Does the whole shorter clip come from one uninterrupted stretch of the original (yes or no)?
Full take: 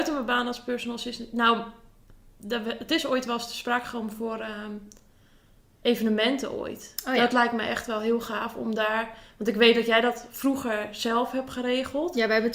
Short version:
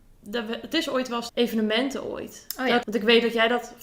no